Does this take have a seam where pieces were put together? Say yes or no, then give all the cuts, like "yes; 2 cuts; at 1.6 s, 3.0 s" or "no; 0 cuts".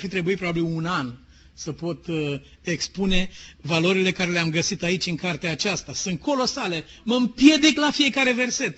no; 0 cuts